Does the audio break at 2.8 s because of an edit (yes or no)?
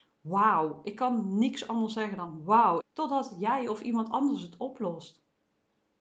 yes